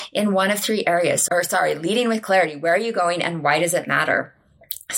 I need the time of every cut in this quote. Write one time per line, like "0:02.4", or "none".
0:01.3